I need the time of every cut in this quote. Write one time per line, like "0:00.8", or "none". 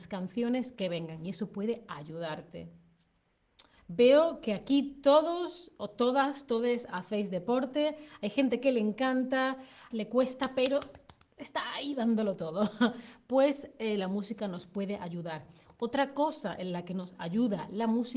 0:03.8
0:09.9